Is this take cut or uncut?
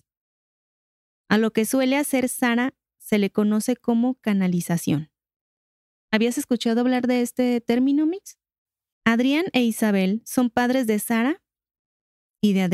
cut